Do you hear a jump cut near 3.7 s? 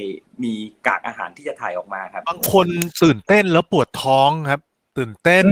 no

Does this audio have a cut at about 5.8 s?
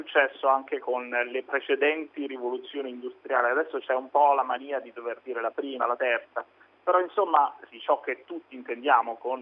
yes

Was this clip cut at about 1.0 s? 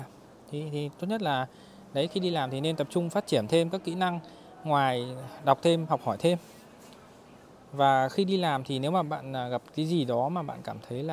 no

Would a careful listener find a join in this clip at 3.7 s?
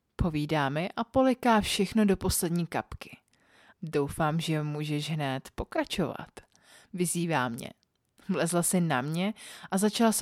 yes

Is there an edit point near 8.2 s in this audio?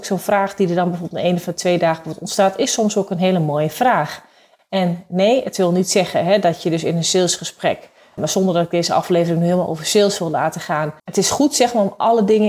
yes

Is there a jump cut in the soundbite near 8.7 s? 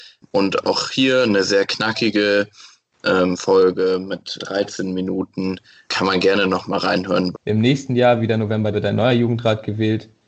yes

